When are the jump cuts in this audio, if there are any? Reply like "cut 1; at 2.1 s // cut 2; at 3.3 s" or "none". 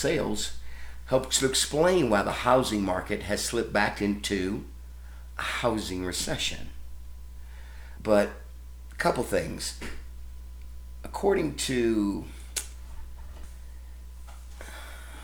cut 1; at 8.0 s

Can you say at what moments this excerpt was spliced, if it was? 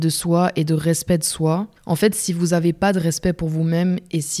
cut 1; at 1.8 s

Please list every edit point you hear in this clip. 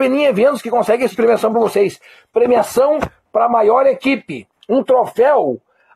cut 1; at 1.1 s // cut 2; at 4.6 s

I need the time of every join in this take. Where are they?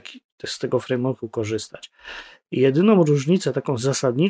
none

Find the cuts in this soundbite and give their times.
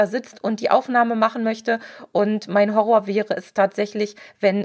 none

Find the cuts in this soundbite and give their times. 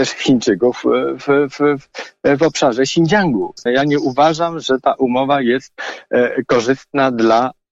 cut 1; at 3.7 s

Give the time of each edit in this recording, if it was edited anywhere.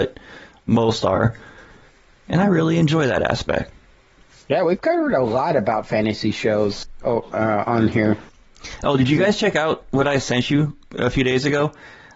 none

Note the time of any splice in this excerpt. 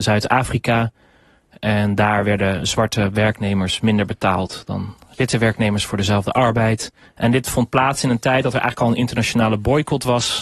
cut 1; at 7.1 s

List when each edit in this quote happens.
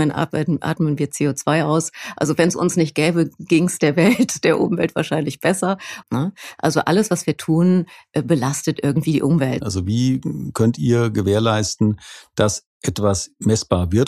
cut 1; at 6.0 s // cut 2; at 9.6 s

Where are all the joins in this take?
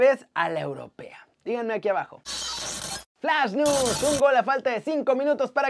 cut 1; at 3.1 s

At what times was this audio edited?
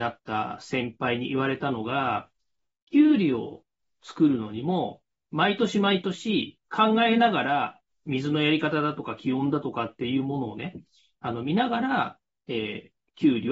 cut 1; at 6.7 s

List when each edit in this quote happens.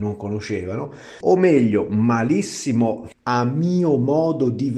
cut 1; at 1.2 s // cut 2; at 3.1 s

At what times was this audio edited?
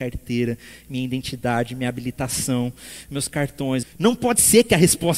cut 1; at 3.8 s

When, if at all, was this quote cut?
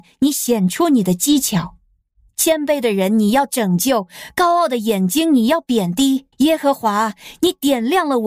cut 1; at 6.3 s

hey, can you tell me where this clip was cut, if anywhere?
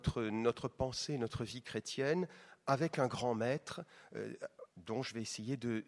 cut 1; at 4.7 s

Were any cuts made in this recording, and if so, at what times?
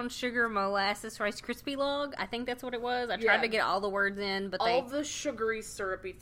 none

